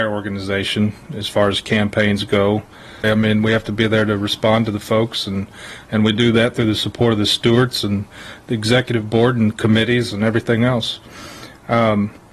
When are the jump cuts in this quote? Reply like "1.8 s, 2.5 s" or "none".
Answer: 3.0 s